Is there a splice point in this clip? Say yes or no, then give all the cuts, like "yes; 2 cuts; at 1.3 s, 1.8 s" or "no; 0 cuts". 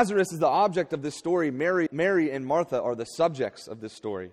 yes; 1 cut; at 1.9 s